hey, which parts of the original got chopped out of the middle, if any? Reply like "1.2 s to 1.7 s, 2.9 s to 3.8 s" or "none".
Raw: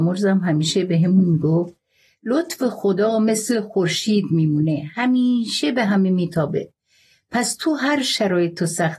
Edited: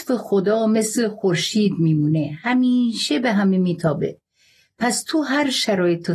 none